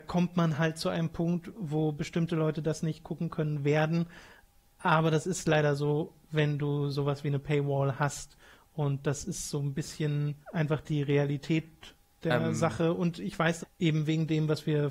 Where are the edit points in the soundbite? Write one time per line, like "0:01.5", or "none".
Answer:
0:10.4
0:13.6